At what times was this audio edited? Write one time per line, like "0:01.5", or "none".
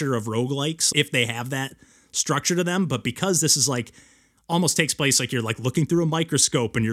0:00.9